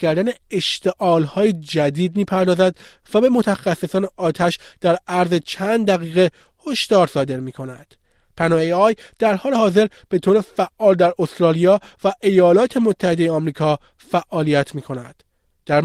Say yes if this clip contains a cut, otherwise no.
no